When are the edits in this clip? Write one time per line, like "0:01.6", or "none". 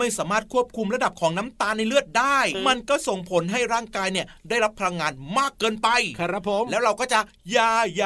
0:02.5